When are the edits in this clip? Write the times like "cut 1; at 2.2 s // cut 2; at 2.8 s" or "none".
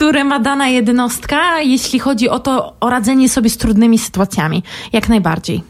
none